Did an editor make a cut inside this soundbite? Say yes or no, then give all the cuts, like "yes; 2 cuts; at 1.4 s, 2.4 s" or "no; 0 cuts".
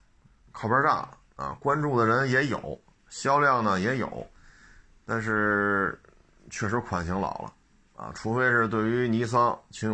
no; 0 cuts